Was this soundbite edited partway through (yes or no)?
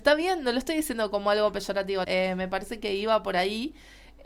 yes